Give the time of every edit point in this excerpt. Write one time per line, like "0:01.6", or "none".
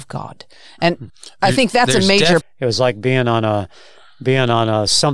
0:01.1
0:02.4